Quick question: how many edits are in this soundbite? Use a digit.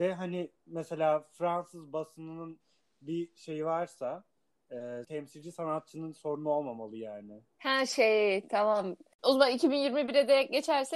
1